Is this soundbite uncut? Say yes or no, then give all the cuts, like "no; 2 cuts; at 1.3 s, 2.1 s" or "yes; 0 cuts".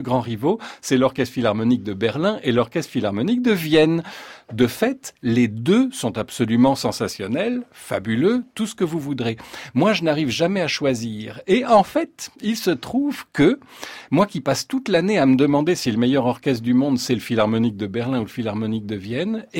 yes; 0 cuts